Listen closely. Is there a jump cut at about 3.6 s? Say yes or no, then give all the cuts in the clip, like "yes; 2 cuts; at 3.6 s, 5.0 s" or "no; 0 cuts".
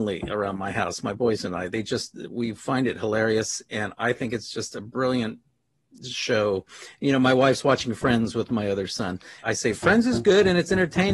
no; 2 cuts; at 7.0 s, 9.4 s